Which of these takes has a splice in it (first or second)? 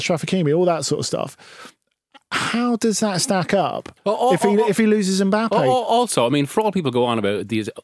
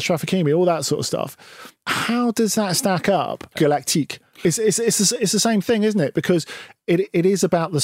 second